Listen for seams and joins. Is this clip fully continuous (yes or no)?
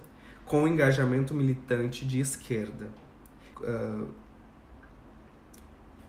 no